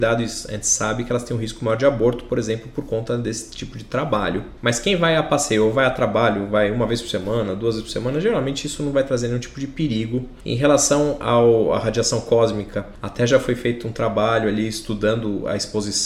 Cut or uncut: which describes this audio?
uncut